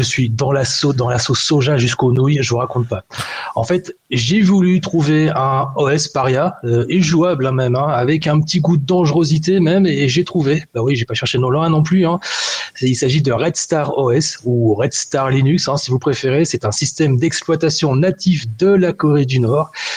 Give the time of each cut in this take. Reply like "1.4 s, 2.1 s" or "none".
none